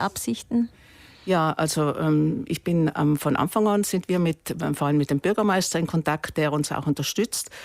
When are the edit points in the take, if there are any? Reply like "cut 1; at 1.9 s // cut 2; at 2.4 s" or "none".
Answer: none